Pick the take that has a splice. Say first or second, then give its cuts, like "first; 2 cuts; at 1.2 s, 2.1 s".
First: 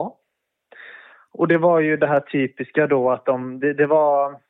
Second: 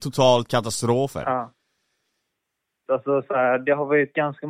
second; 1 cut; at 2.9 s